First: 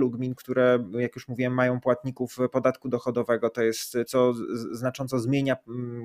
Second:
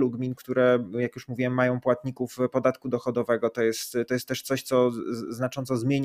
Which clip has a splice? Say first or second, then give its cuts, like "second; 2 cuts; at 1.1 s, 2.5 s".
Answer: first; 1 cut; at 4.1 s